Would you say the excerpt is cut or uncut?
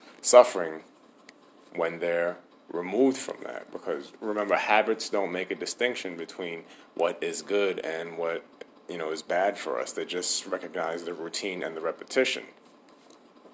uncut